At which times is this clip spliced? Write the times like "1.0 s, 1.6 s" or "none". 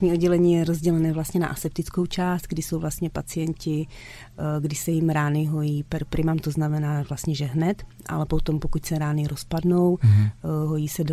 none